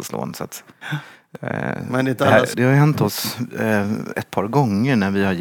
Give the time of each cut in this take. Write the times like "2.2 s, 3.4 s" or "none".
2.5 s